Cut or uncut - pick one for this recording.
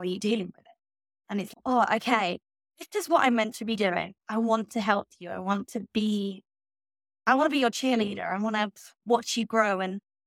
uncut